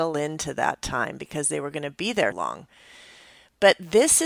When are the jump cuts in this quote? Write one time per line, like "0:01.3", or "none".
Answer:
0:02.3